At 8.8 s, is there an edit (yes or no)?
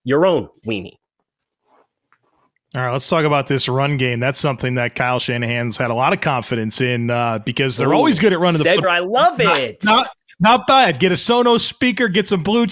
yes